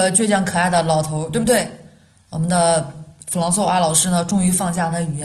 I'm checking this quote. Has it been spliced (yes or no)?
no